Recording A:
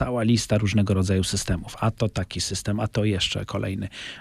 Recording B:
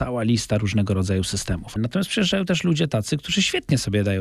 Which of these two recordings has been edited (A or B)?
B